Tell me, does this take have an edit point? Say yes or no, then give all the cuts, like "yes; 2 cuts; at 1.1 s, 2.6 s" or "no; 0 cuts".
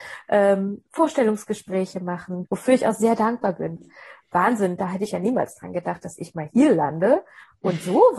yes; 2 cuts; at 2.5 s, 3.8 s